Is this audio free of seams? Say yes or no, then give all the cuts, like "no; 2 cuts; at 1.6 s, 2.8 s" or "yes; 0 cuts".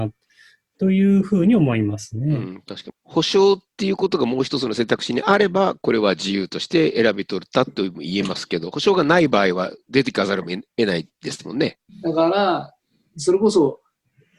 no; 2 cuts; at 2.9 s, 11.9 s